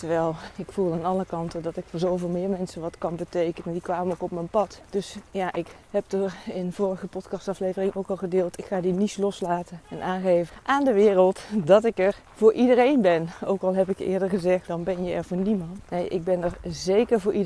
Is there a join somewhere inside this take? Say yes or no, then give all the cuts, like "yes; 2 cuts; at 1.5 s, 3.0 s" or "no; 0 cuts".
yes; 1 cut; at 14.7 s